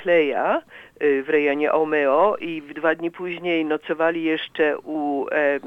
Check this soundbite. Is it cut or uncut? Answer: uncut